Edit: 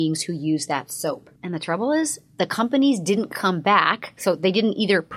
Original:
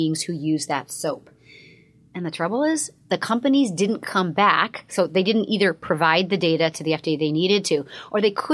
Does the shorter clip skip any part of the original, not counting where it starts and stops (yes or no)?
yes